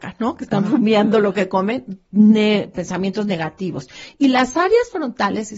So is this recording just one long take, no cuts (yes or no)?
yes